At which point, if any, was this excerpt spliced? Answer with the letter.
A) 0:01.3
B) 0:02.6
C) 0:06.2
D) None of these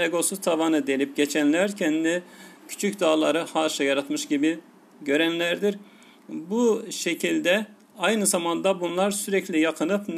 B